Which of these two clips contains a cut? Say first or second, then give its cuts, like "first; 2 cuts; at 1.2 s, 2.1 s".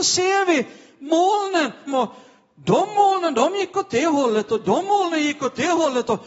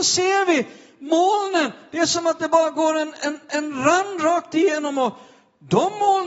first; 1 cut; at 1.9 s